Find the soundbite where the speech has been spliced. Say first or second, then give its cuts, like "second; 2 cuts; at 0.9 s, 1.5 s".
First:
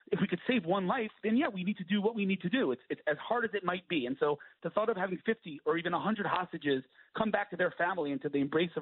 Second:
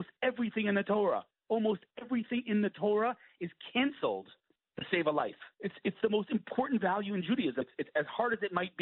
second; 2 cuts; at 5.5 s, 7.6 s